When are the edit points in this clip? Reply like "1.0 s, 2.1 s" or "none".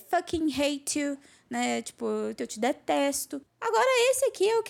2.4 s, 3.5 s

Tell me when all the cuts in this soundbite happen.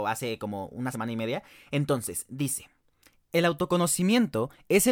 0.9 s

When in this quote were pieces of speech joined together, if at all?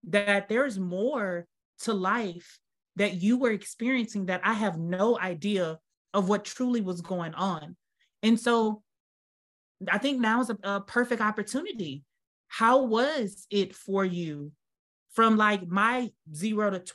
none

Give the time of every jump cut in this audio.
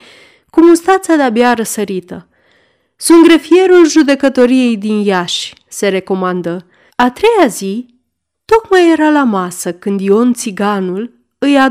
6.9 s

